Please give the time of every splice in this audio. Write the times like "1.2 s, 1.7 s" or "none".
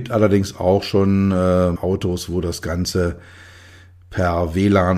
1.8 s